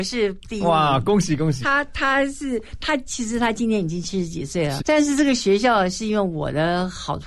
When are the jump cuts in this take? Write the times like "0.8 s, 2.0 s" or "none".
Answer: 1.6 s, 4.8 s